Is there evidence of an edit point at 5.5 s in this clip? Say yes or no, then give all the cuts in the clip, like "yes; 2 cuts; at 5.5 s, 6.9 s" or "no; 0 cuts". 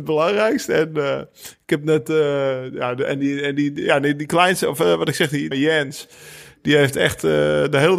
yes; 1 cut; at 5.5 s